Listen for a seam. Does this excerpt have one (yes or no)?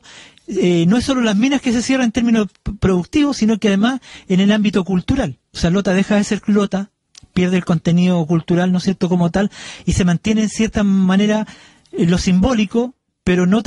no